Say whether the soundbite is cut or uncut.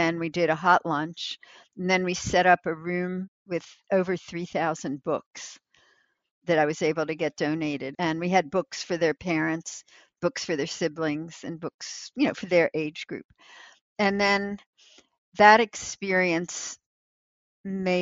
cut